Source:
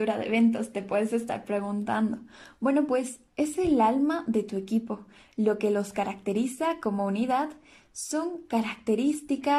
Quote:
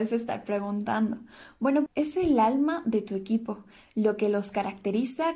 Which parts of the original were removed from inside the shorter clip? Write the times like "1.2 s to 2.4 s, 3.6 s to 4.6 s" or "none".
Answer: 2.9 s to 3.3 s